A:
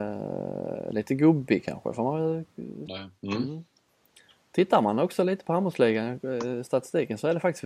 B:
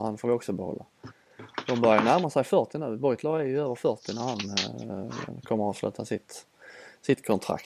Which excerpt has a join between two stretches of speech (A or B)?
A